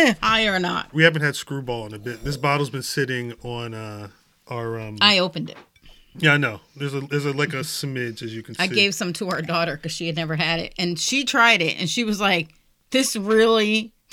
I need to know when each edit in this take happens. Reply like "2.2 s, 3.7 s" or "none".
0.9 s